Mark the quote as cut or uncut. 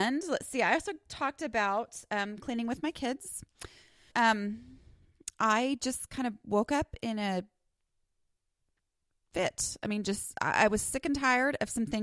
cut